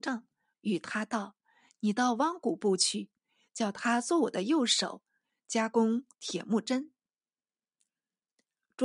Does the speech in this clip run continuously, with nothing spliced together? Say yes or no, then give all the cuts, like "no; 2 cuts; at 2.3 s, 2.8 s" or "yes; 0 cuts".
yes; 0 cuts